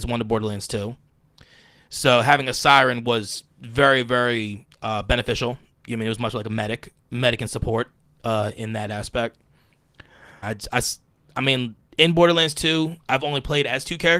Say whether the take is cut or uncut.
cut